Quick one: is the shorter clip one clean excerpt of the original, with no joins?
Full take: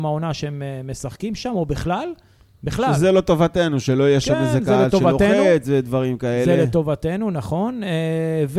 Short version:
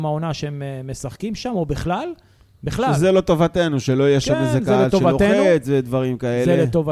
yes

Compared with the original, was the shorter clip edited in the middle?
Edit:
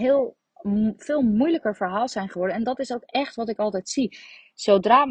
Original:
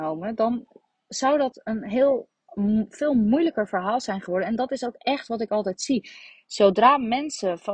no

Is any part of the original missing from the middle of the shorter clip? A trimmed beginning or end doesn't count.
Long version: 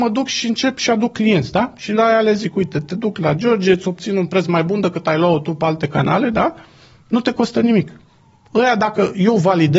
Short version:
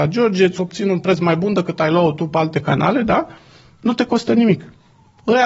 no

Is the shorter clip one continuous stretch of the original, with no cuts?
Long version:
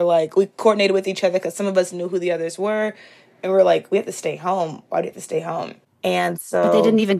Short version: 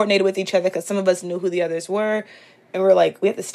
yes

